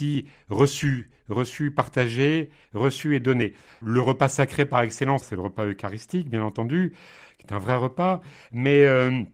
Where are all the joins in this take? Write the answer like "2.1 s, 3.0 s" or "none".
3.7 s